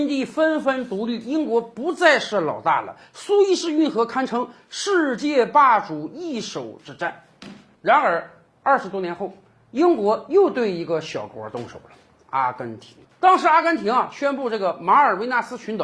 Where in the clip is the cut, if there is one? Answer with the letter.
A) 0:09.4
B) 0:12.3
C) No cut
C